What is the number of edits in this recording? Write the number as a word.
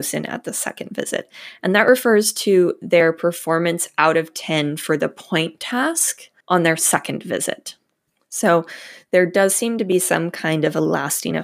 two